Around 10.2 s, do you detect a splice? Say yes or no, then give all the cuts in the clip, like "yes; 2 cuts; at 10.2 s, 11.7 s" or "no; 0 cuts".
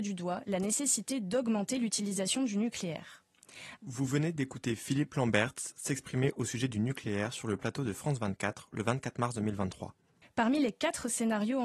yes; 3 cuts; at 3.8 s, 5.7 s, 10.2 s